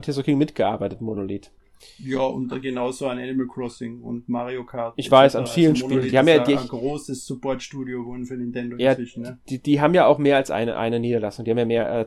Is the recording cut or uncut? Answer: uncut